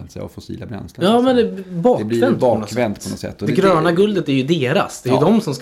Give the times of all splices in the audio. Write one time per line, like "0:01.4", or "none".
none